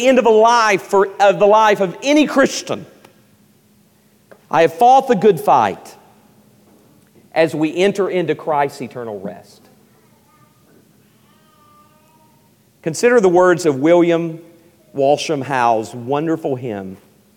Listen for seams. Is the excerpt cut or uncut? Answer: uncut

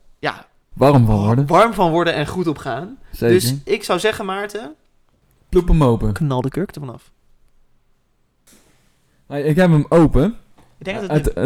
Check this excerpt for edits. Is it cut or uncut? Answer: uncut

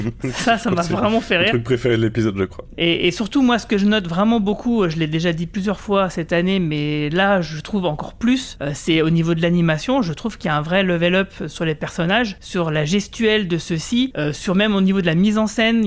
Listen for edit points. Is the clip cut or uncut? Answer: cut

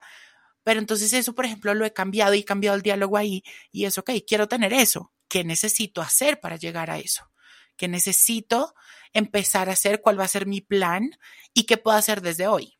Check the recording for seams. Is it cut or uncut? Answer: uncut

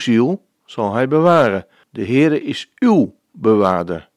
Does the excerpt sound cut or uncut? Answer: cut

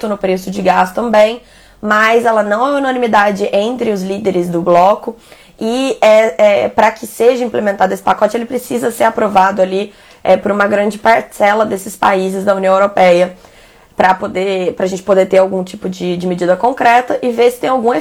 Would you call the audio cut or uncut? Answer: uncut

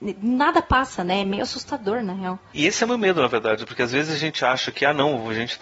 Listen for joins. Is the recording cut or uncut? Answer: uncut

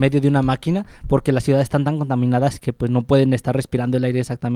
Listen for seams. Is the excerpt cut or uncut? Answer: uncut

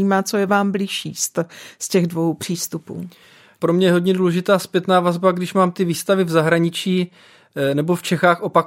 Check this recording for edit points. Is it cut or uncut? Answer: uncut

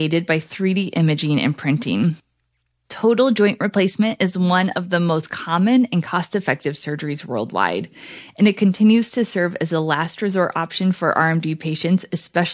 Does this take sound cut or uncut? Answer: uncut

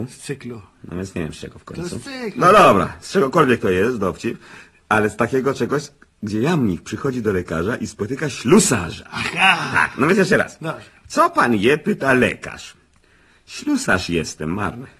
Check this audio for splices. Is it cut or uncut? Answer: uncut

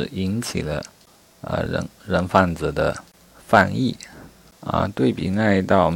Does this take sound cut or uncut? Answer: uncut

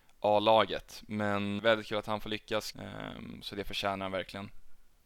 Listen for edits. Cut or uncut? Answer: cut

